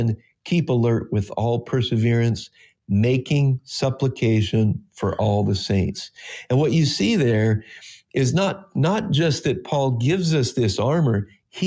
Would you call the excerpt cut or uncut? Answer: uncut